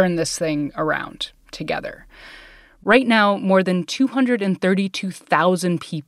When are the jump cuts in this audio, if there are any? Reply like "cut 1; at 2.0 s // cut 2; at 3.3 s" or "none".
none